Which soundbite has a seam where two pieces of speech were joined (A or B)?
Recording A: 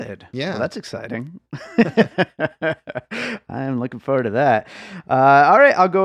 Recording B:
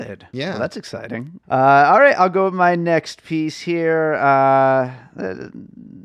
B